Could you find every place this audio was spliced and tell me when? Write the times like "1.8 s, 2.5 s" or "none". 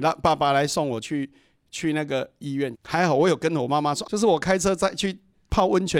2.7 s, 4.1 s